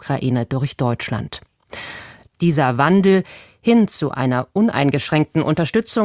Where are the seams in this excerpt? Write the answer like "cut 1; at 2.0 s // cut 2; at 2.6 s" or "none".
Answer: cut 1; at 2.3 s